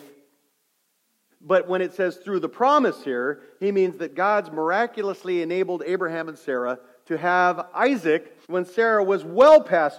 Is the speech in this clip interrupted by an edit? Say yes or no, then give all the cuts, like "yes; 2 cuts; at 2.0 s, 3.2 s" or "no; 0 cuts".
yes; 2 cuts; at 1.3 s, 8.4 s